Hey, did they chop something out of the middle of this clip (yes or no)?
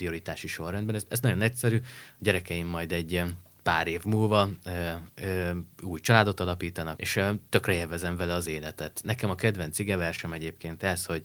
yes